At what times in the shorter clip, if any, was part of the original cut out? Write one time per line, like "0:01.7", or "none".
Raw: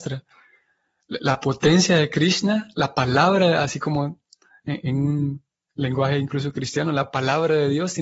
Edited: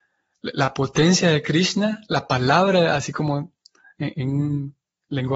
none